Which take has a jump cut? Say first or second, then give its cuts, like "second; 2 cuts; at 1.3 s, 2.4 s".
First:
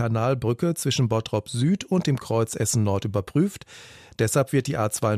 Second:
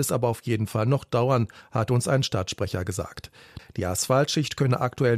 second; 1 cut; at 3.6 s